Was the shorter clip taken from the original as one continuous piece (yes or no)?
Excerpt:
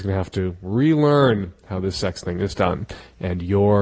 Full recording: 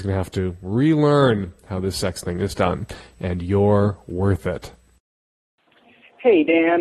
yes